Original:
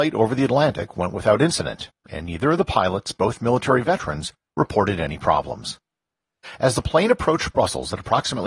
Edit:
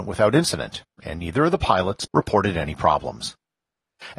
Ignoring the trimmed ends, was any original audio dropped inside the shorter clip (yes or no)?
yes